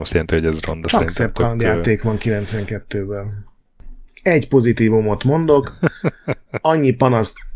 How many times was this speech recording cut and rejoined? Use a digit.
1